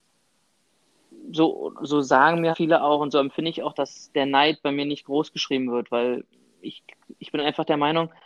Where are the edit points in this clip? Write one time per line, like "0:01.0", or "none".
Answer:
0:02.5

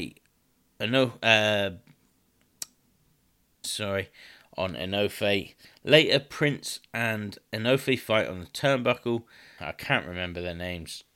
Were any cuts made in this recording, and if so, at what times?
0:03.6
0:05.6
0:09.6

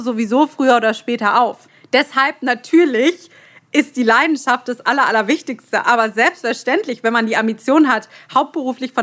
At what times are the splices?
none

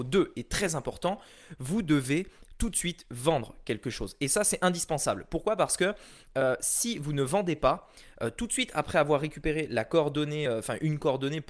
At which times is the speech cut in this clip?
none

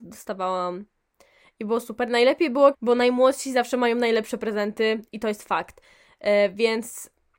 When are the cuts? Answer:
0:02.7

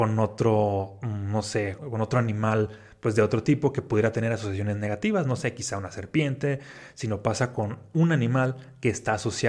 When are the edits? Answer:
0:01.8

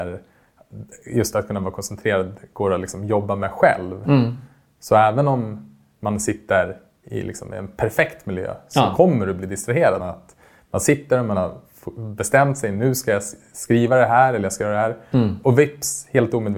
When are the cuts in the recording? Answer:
0:10.0

